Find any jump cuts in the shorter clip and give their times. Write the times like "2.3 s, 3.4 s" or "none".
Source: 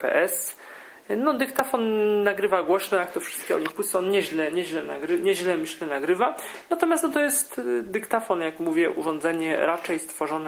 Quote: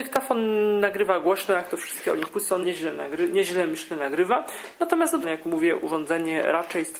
2.6 s, 5.2 s

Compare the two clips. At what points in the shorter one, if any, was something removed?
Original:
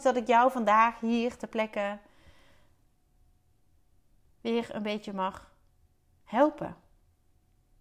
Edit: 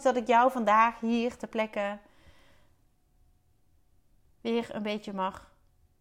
none

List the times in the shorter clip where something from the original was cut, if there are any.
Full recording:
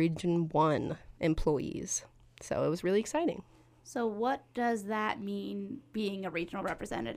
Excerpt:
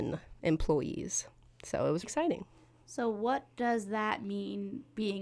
2.0 s

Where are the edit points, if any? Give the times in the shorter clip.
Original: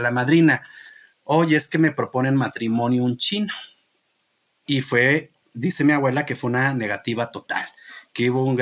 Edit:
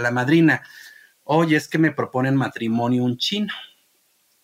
none

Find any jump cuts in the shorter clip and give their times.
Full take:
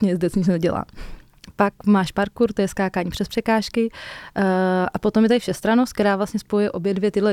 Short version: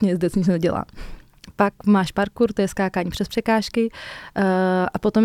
none

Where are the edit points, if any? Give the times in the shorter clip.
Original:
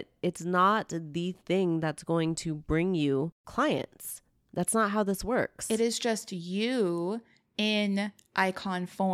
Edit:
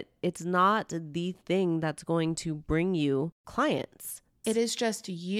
4.4 s

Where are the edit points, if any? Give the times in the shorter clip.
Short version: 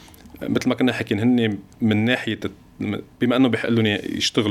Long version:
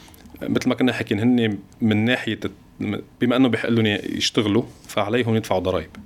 none

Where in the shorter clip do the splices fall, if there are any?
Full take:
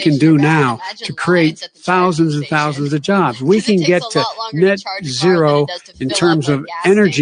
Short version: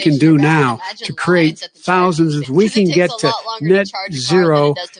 2.4 s

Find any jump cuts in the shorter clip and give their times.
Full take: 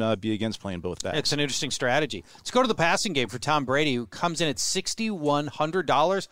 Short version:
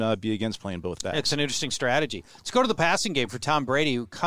none

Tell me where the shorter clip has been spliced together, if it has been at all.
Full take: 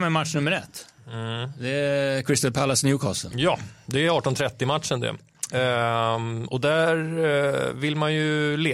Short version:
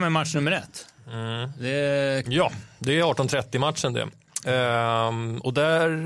2.2 s

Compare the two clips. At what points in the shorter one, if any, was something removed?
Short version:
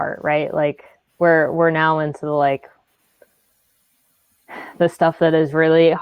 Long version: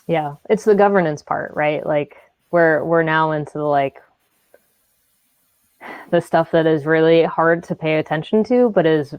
none

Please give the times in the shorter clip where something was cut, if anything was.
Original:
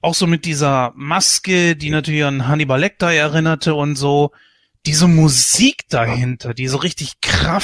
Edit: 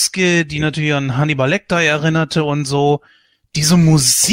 none

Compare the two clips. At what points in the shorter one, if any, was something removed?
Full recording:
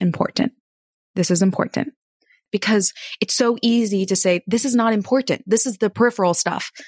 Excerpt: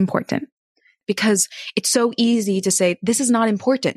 none

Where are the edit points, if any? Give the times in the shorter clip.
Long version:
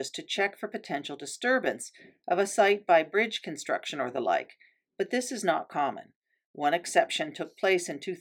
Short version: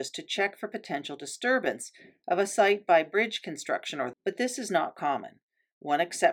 4.1 s

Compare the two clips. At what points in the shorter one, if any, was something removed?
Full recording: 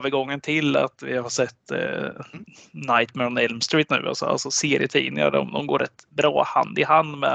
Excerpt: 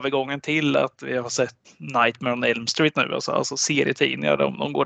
1.6 s

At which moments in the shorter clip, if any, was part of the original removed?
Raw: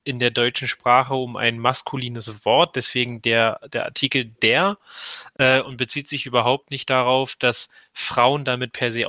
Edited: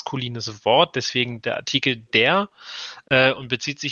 1.4 s

